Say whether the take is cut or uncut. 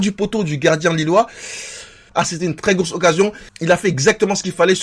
uncut